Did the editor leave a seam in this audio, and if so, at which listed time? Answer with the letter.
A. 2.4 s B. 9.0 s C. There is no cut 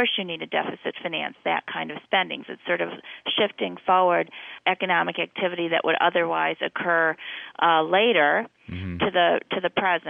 A